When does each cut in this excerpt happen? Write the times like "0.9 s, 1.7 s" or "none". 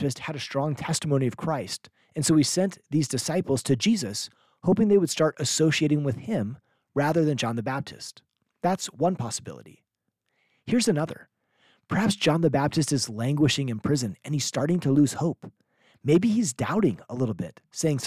none